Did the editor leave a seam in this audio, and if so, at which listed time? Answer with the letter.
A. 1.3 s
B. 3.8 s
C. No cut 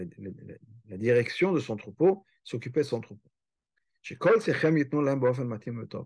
C